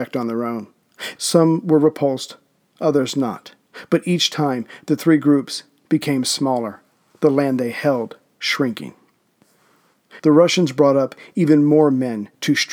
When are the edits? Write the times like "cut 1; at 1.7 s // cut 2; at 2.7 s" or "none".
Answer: cut 1; at 1.2 s // cut 2; at 10.2 s